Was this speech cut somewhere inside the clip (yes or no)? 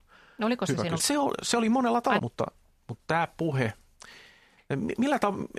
yes